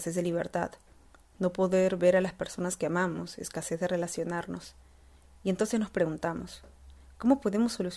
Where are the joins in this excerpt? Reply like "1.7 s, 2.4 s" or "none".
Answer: none